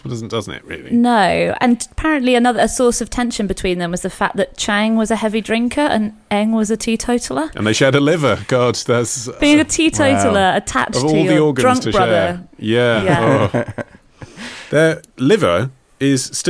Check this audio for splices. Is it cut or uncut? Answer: uncut